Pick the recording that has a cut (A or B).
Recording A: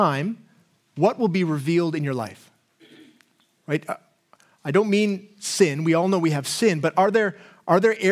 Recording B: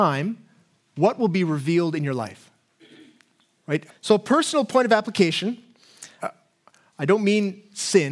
B